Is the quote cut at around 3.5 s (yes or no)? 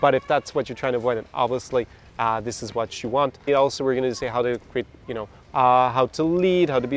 yes